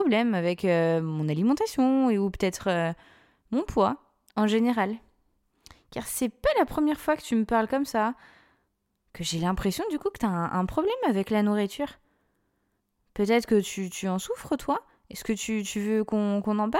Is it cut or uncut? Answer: uncut